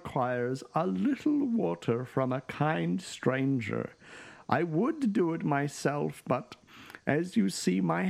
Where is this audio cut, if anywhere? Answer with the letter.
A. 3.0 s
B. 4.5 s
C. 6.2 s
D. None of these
D